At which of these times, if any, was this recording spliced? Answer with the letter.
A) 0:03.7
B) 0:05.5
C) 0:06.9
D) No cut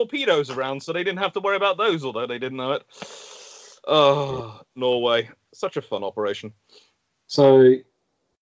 D